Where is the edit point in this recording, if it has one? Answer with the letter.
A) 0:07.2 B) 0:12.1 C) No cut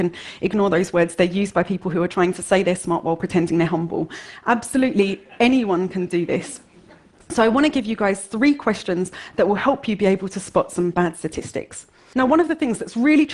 B